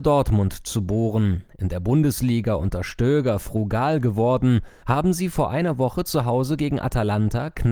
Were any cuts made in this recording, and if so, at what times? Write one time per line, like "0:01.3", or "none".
0:04.8